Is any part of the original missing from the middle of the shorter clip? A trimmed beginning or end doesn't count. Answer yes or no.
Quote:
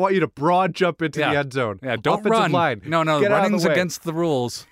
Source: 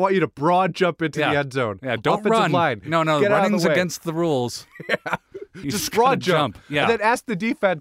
no